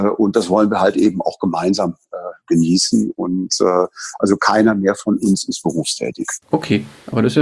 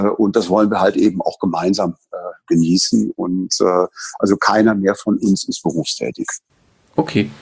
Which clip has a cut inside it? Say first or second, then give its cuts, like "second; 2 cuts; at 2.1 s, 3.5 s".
first; 1 cut; at 6.4 s